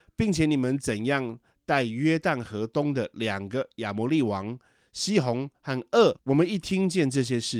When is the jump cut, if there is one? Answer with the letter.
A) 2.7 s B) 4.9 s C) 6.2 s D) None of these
C